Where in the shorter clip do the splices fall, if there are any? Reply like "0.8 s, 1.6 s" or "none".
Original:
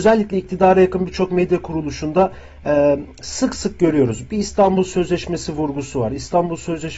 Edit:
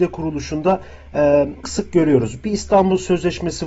1.6 s